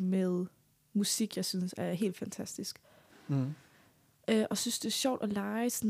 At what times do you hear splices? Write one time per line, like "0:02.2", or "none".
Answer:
0:03.1